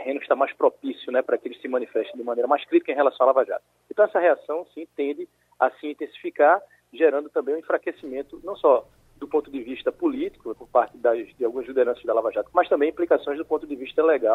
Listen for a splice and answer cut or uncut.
cut